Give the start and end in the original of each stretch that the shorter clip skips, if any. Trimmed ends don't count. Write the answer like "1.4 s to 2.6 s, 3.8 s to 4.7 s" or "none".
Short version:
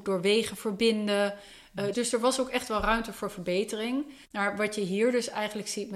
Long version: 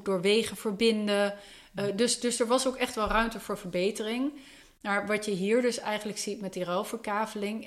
1.9 s to 2.2 s, 4.5 s to 4.7 s